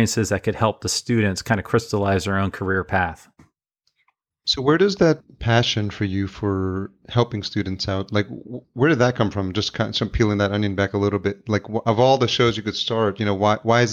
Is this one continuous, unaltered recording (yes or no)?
yes